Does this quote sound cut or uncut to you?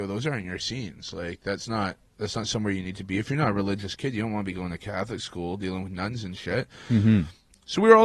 uncut